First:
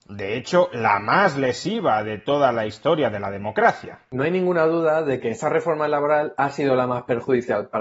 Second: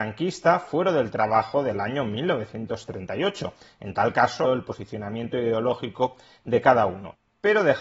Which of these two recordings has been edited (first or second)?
second